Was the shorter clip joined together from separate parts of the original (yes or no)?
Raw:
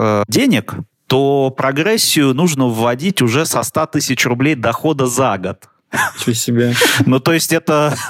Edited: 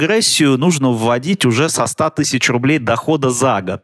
no